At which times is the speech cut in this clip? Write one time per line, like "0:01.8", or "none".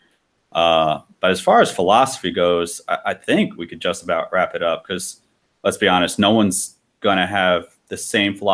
none